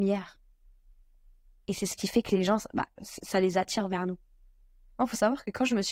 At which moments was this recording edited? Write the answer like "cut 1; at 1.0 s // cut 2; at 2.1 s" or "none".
cut 1; at 4.9 s